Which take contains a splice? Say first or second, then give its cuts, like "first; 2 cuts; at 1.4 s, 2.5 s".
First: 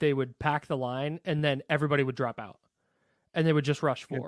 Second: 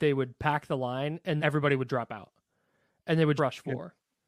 second; 2 cuts; at 1.4 s, 3.4 s